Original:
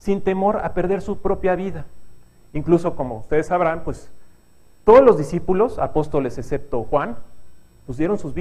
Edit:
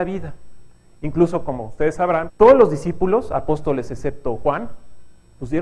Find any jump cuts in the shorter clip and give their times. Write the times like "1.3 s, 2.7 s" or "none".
2.3 s